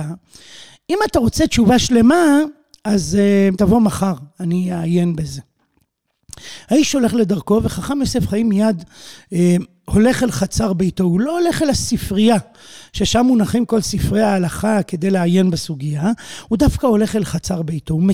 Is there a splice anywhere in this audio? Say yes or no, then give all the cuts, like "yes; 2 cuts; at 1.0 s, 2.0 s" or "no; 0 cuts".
yes; 1 cut; at 3.5 s